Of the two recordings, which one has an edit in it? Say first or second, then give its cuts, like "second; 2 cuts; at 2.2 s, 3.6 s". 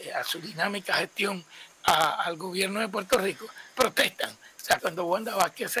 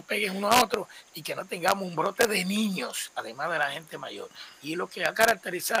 first; 2 cuts; at 3.7 s, 4.8 s